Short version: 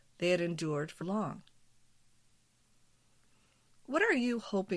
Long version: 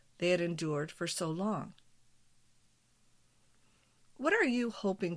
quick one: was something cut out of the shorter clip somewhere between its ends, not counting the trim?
yes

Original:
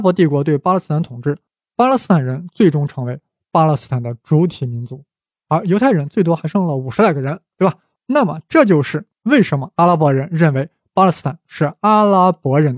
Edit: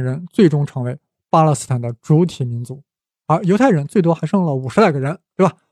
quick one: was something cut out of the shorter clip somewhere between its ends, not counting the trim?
no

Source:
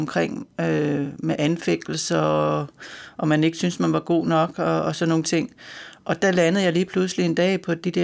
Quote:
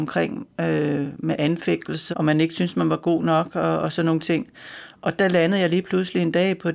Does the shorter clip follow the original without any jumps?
no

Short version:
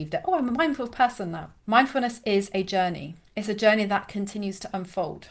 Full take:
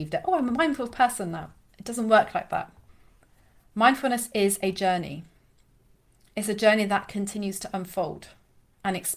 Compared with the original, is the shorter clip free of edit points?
no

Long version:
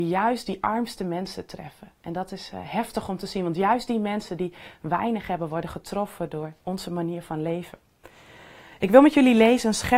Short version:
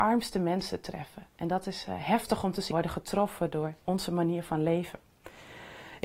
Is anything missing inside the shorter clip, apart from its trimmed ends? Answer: yes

